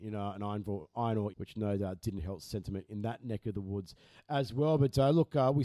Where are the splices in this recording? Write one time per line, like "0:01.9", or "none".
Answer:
0:01.3

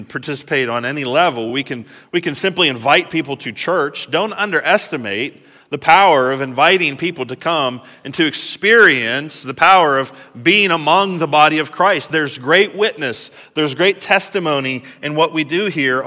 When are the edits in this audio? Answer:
none

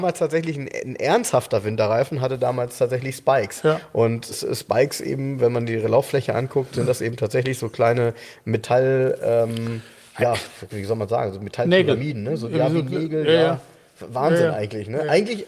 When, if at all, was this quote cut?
0:04.3

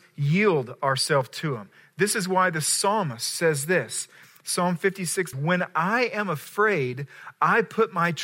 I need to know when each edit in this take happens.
0:05.3

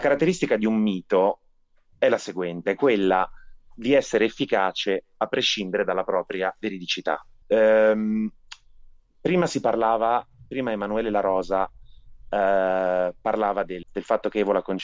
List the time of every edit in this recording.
0:07.4
0:13.8

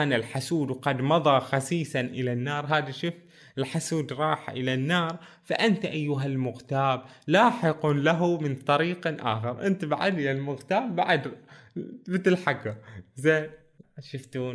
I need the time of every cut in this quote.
none

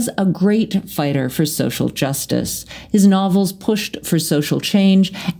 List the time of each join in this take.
none

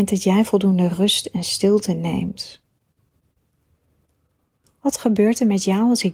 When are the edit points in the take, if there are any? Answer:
none

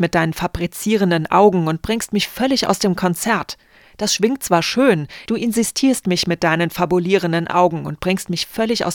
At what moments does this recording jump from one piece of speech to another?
0:05.3

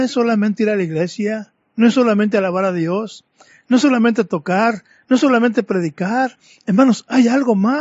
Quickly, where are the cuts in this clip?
0:03.6

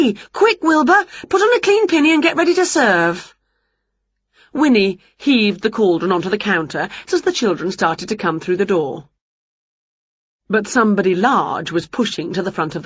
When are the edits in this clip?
0:07.1

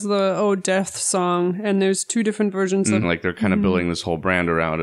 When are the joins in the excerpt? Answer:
0:03.0

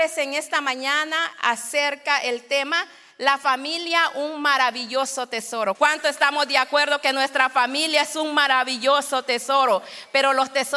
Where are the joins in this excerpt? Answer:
0:05.8

